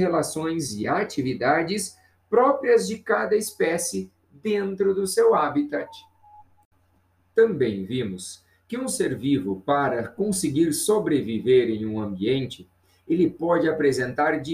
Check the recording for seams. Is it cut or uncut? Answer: uncut